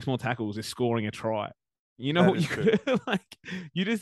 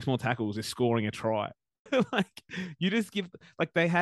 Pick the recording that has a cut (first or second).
second